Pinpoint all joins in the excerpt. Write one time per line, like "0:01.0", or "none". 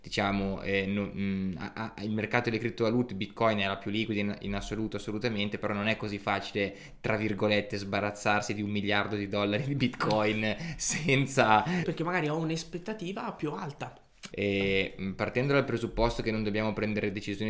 0:11.8
0:14.3